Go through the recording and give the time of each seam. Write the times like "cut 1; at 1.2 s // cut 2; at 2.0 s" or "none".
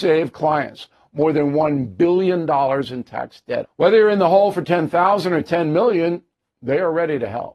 cut 1; at 3.6 s